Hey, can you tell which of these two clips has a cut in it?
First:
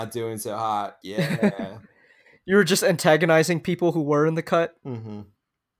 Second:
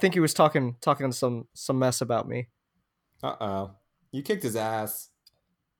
first; 1 cut; at 1.0 s

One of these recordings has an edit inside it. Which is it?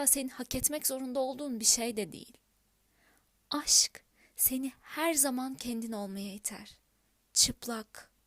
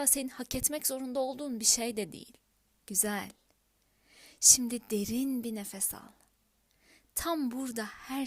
second; 1 cut; at 2.7 s

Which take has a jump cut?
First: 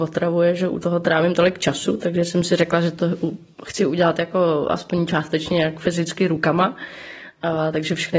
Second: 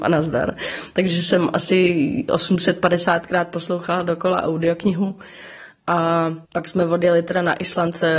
second; 1 cut; at 6.5 s

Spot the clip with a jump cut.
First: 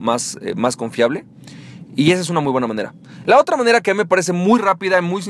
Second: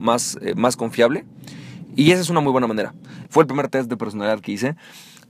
second; 1 cut; at 3.2 s

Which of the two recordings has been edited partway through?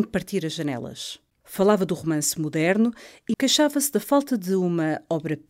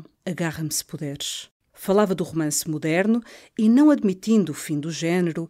first; 2 cuts; at 1.3 s, 3.3 s

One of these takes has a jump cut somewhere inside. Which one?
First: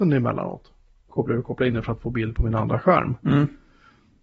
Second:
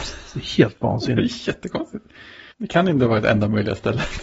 second; 1 cut; at 2.5 s

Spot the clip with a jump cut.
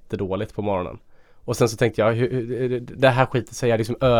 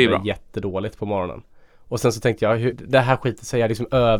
second; 1 cut; at 2.7 s

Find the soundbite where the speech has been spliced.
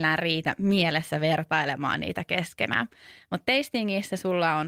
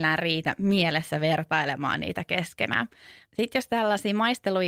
second; 1 cut; at 3.3 s

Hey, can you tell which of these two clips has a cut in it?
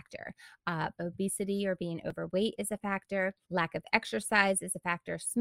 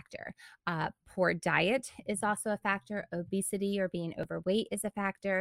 first; 2 cuts; at 1.0 s, 3.4 s

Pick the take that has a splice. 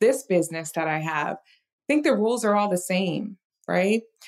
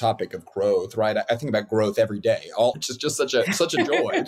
second; 1 cut; at 2.7 s

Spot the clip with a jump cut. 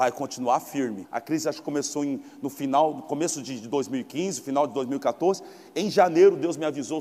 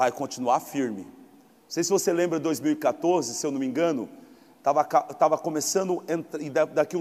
first; 1 cut; at 1.0 s

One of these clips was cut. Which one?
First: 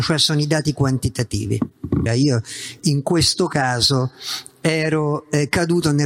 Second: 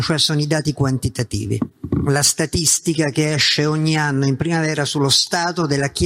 first; 1 cut; at 2.1 s

